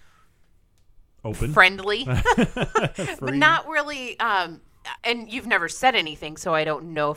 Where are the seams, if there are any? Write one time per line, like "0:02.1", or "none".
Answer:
0:05.0